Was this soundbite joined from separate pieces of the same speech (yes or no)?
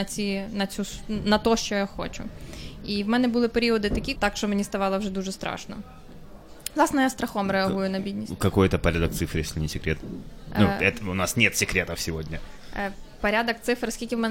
yes